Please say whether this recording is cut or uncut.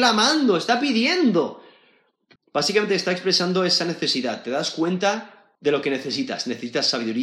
cut